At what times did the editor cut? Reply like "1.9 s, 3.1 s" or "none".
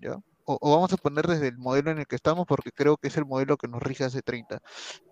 none